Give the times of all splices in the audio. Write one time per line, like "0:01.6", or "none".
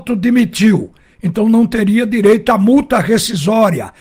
none